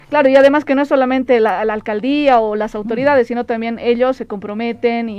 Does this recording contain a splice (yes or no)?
no